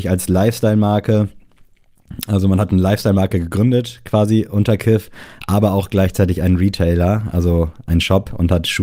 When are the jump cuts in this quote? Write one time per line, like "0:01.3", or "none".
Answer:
none